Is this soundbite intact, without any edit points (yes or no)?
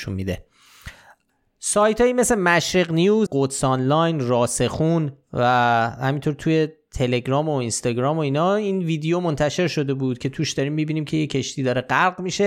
no